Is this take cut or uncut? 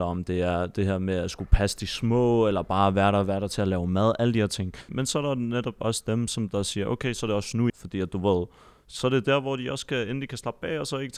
cut